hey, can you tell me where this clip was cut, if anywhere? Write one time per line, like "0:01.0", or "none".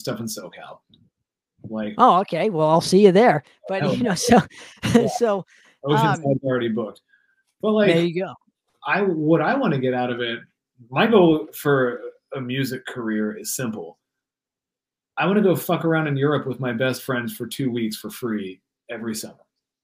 none